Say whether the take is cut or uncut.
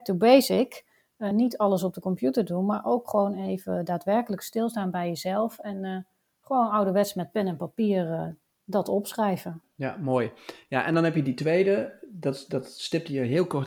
uncut